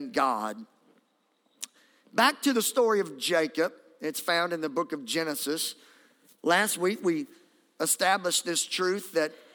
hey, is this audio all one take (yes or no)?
yes